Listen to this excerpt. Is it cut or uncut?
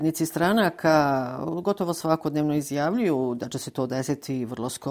uncut